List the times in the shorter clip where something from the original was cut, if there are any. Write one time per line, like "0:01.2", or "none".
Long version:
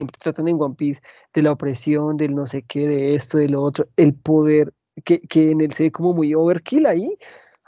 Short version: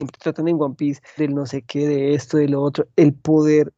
0:01.2